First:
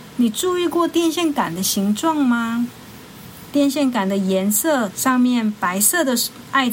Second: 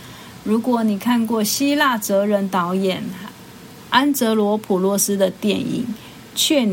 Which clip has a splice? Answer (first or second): first